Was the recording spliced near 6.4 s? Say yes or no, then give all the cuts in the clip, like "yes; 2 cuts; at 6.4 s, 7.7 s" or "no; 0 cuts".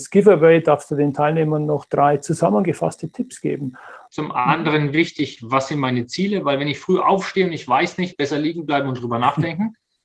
no; 2 cuts; at 4.1 s, 8.1 s